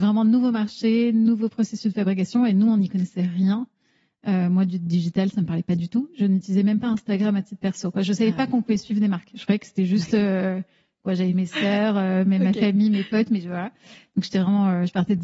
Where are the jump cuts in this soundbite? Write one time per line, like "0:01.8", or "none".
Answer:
none